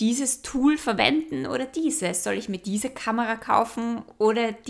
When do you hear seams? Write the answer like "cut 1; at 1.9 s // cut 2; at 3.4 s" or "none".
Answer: none